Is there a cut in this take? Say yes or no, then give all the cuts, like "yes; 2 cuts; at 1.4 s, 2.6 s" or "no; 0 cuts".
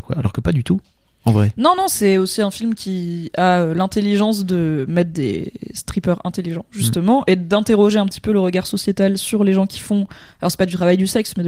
no; 0 cuts